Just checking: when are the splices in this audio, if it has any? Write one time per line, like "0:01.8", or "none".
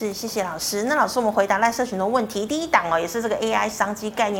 none

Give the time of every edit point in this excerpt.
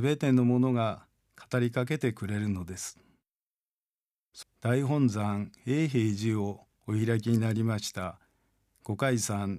0:04.4

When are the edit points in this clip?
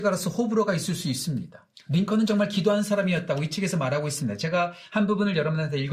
0:01.7

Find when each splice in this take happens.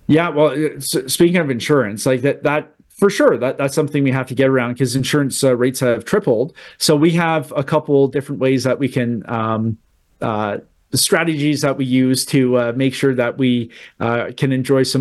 none

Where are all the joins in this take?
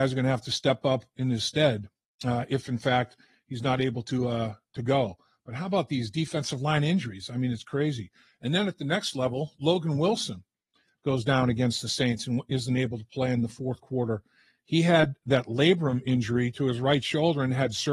none

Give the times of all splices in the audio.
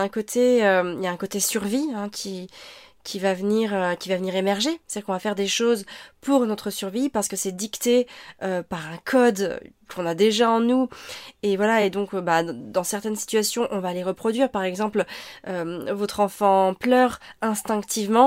none

